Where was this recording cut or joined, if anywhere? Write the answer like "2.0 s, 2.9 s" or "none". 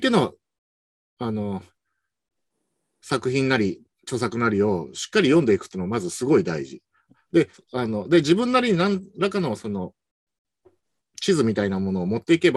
3.9 s, 7.5 s